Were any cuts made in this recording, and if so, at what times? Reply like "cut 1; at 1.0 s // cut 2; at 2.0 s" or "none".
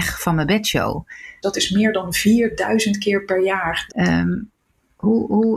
cut 1; at 1.4 s // cut 2; at 3.9 s